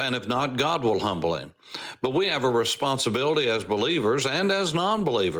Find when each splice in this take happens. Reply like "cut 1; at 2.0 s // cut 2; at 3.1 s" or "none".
none